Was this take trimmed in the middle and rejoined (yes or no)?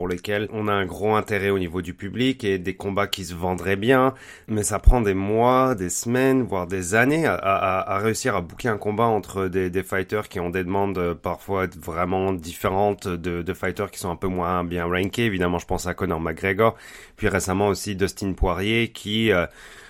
no